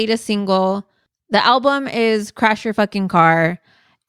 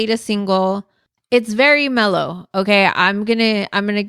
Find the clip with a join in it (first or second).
second